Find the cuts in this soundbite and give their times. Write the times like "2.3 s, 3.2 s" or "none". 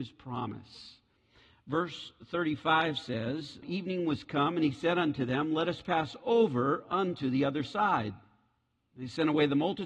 3.6 s